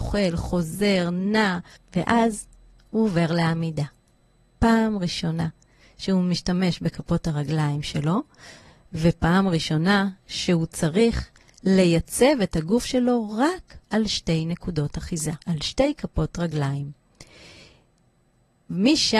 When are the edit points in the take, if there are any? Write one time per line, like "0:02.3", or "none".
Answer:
0:01.8
0:13.8
0:15.4